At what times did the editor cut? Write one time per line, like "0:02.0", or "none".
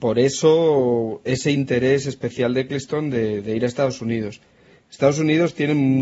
none